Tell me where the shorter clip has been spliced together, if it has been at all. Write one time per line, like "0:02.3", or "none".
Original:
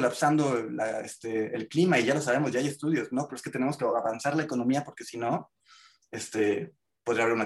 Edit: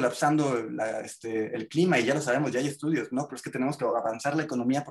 none